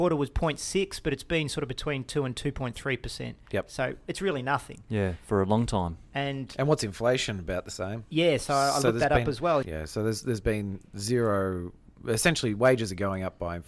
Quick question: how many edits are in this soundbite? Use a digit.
1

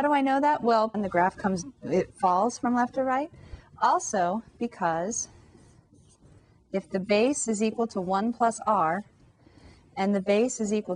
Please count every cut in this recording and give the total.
1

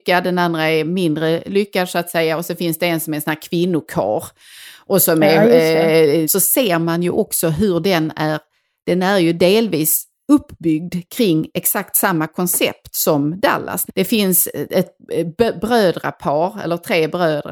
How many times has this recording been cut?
2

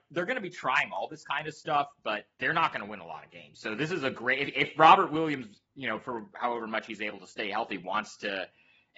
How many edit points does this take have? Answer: 1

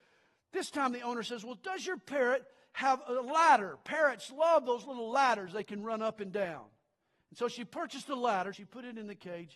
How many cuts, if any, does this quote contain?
2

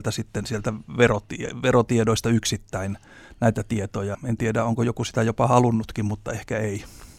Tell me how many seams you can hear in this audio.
1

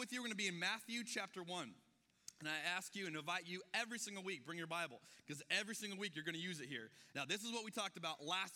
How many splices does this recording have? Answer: 1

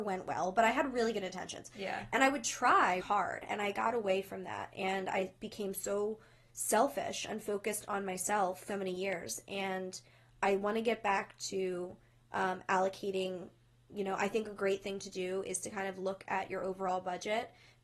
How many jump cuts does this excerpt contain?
2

